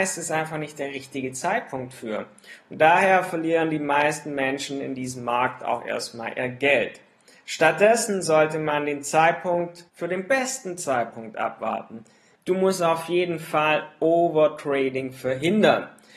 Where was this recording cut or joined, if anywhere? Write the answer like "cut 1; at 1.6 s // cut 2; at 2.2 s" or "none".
cut 1; at 9.9 s // cut 2; at 12.4 s